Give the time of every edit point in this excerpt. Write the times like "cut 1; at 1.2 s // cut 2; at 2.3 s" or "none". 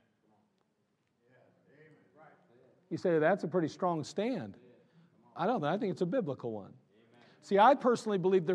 cut 1; at 1.1 s